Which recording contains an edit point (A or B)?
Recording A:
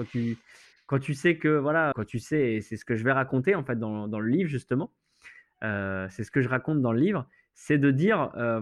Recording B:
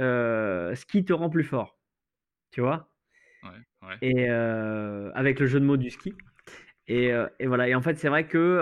A